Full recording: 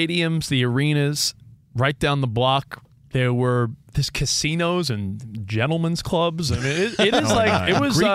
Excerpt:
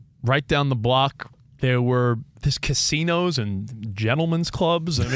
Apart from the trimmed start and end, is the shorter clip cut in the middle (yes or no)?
no